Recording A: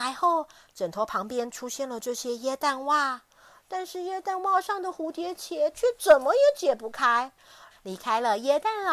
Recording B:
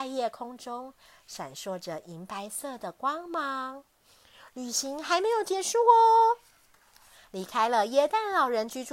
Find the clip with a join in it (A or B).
A